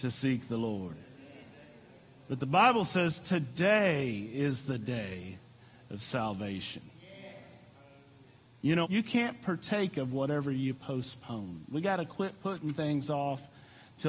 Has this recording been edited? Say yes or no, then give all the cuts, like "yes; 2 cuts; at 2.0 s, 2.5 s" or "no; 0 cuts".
yes; 1 cut; at 8.8 s